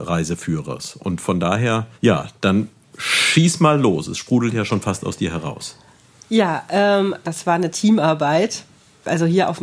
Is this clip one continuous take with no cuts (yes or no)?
no